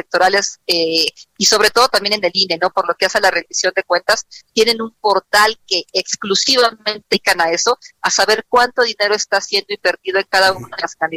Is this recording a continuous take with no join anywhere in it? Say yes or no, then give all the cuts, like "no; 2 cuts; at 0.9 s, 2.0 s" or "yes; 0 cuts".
yes; 0 cuts